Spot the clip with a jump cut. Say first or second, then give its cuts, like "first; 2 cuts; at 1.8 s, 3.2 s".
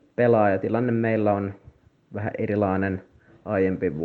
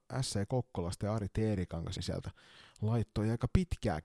second; 1 cut; at 2.0 s